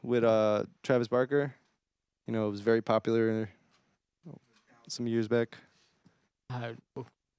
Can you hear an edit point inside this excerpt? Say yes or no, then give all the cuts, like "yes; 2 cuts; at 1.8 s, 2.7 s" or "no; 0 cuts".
no; 0 cuts